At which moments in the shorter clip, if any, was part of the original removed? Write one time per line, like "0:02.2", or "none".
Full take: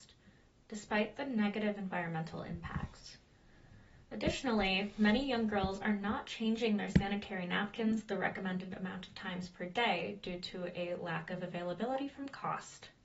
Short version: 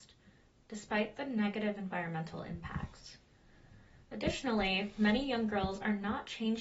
none